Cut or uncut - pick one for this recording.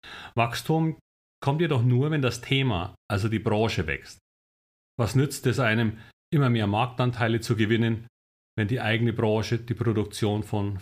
cut